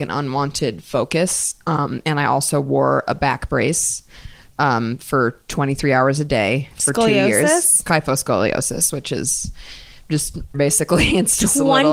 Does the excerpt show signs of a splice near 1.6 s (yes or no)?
no